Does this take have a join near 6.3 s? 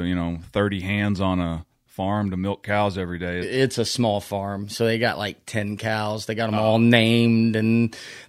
no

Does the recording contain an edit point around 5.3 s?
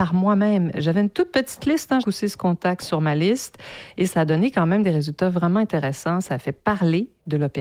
no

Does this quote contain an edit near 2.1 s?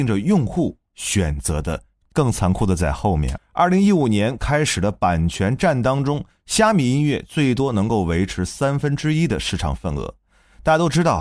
yes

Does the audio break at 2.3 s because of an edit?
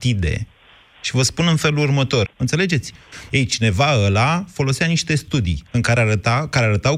yes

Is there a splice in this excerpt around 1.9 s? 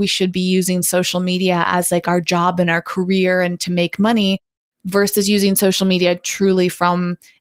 no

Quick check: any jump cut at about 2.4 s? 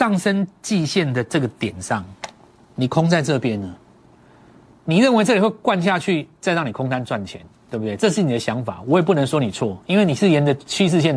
no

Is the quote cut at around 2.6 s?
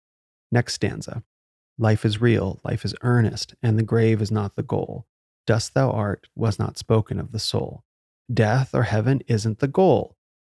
no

